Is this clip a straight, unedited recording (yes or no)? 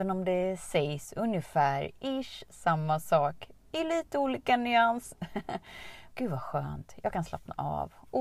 no